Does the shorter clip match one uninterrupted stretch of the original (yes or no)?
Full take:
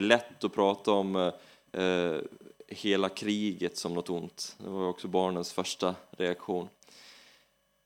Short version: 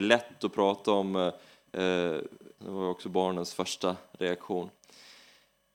no